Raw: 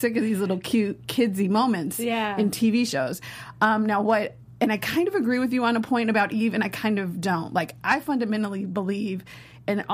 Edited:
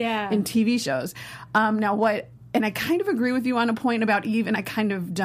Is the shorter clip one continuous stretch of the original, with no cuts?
yes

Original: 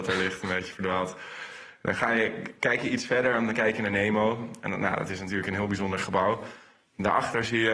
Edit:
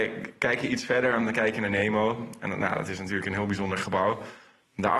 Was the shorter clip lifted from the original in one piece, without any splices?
yes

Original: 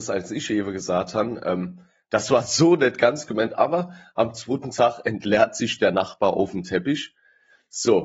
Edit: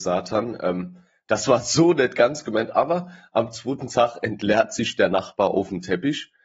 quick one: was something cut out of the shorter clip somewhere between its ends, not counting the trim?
no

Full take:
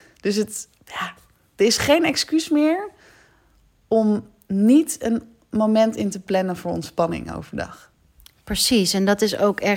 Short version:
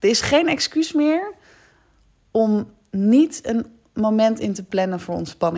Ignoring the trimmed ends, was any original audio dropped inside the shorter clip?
no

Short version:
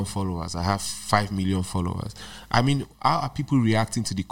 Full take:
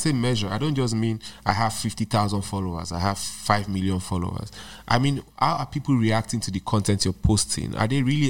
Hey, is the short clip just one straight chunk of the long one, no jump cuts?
yes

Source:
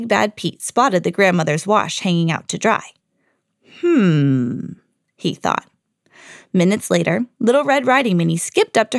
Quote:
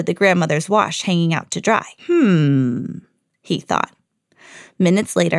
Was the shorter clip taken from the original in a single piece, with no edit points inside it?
no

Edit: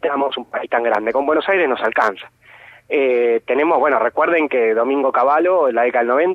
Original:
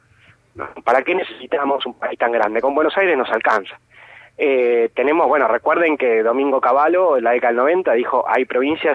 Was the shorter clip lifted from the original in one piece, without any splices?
yes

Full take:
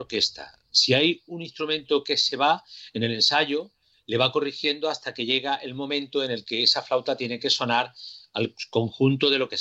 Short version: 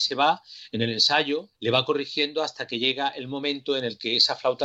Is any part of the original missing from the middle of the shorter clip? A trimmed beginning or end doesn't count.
yes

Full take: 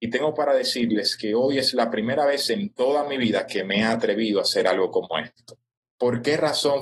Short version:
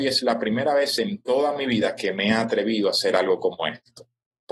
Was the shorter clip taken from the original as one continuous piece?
yes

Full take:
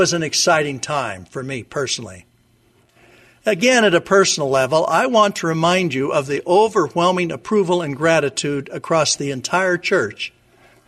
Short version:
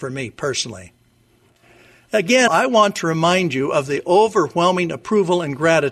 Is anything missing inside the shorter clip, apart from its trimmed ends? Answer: yes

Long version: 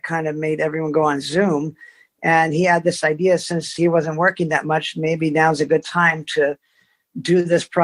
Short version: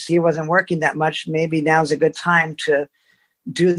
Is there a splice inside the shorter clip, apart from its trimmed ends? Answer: no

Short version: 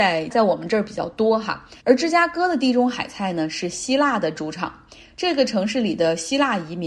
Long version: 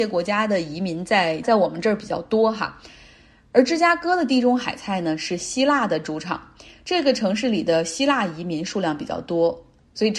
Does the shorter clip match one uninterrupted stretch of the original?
no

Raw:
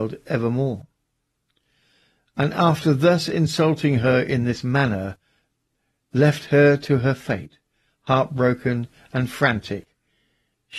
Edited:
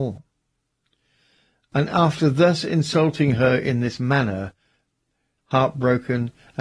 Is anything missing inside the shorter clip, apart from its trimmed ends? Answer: yes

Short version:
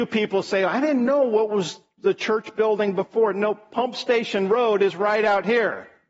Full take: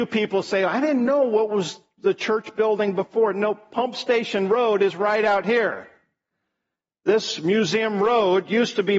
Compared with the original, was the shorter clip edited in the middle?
no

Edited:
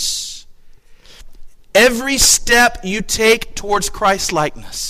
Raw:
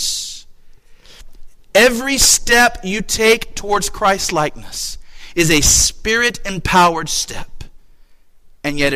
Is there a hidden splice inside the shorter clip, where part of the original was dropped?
no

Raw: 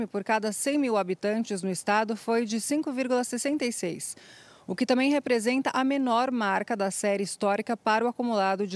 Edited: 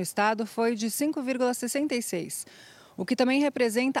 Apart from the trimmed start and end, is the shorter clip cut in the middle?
no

